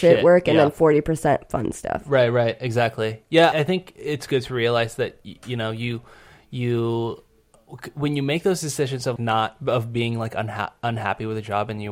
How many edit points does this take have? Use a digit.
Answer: 2